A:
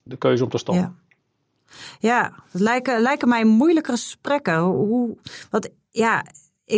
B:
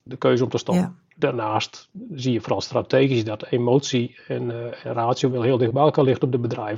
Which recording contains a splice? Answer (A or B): B